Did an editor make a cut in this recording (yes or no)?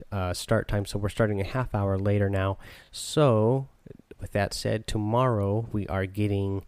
no